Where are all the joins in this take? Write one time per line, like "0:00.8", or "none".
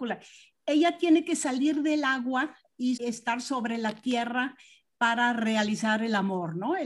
0:03.0